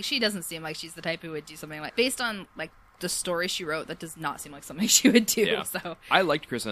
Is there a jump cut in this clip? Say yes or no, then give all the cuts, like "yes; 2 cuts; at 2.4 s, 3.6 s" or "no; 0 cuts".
yes; 1 cut; at 1.9 s